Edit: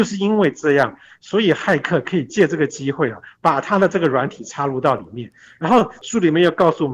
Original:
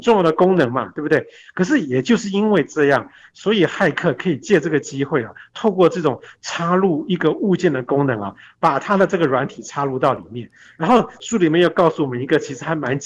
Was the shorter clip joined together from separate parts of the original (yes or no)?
yes